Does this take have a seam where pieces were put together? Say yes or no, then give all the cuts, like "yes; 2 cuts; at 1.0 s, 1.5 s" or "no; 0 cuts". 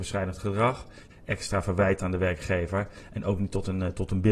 yes; 1 cut; at 1.1 s